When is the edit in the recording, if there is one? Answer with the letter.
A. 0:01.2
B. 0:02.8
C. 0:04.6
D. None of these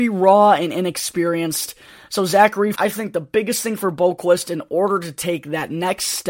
B